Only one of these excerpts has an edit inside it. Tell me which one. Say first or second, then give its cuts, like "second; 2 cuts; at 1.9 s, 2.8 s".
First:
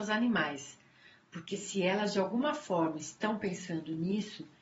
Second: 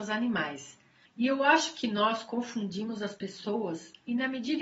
second; 1 cut; at 1.1 s